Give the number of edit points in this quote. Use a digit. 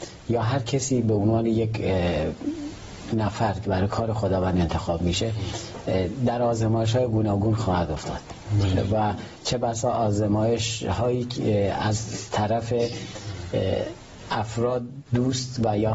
1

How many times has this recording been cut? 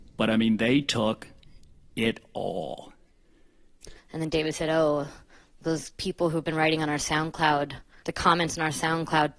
1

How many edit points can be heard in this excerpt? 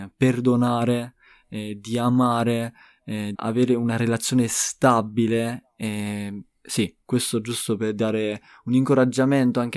1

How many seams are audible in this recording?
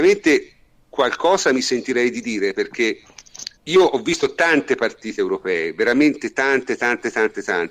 1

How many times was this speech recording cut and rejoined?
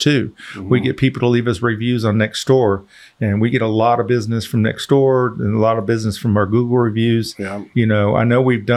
1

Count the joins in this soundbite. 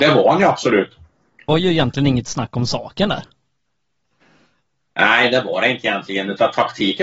1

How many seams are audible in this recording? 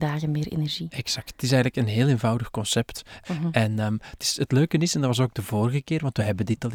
1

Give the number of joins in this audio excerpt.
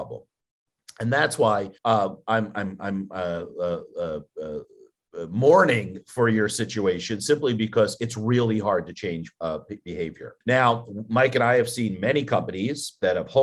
2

